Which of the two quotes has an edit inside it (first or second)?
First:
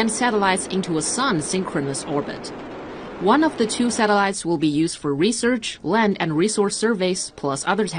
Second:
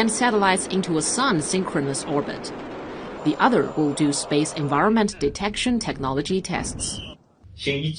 second